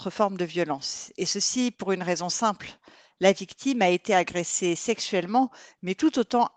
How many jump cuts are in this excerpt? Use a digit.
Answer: 0